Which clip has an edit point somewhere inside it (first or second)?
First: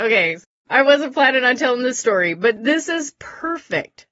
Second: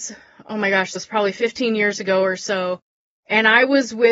second